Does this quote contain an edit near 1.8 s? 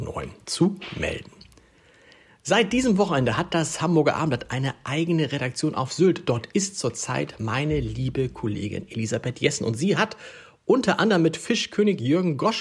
no; 0 cuts

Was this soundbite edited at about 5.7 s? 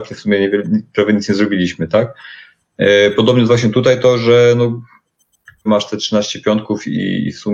yes; 1 cut; at 5.7 s

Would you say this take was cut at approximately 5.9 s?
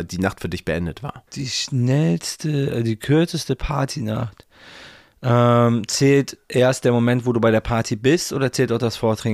no; 1 cut; at 1.3 s

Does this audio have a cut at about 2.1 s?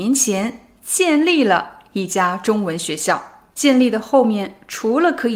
no; 1 cut; at 3.5 s

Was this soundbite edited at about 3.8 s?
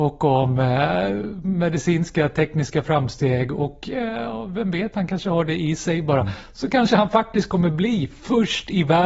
no; 0 cuts

